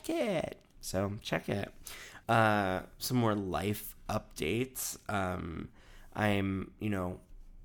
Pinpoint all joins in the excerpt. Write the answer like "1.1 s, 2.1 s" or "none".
2.2 s